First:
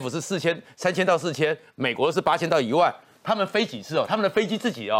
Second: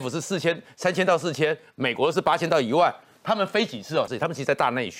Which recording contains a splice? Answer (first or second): second